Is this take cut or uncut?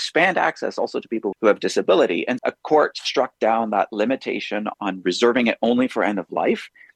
cut